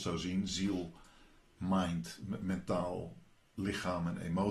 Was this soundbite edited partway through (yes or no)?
no